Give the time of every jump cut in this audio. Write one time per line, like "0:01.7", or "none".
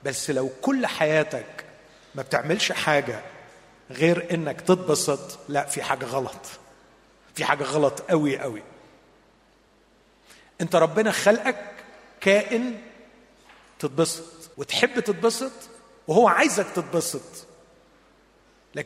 0:08.4
0:14.5